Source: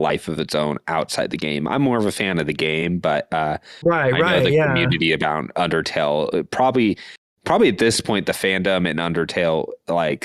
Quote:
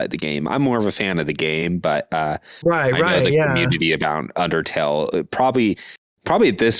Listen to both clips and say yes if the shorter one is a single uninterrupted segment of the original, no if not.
yes